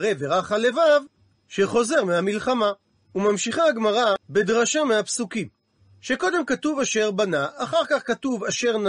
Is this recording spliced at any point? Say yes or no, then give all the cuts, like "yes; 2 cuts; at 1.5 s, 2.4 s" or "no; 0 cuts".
yes; 1 cut; at 4.2 s